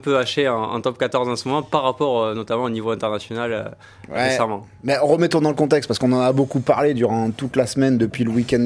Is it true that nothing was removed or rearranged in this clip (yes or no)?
yes